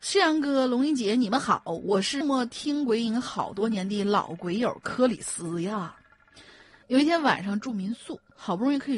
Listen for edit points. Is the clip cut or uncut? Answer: cut